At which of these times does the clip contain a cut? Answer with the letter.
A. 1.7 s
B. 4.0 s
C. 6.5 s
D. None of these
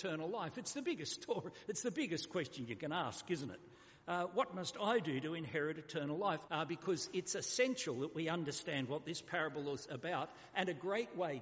C